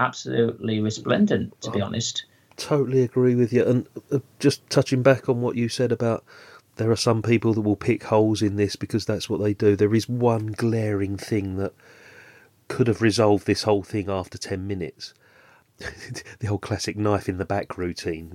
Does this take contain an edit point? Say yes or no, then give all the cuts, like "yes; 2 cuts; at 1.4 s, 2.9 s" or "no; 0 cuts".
no; 0 cuts